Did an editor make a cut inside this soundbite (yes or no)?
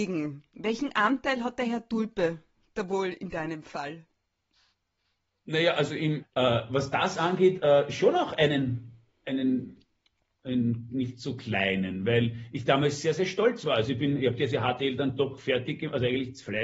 yes